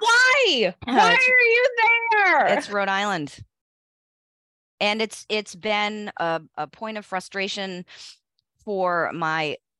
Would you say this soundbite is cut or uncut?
uncut